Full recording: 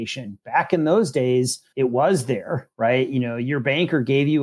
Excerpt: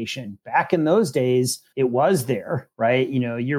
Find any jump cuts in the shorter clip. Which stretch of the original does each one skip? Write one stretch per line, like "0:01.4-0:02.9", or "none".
none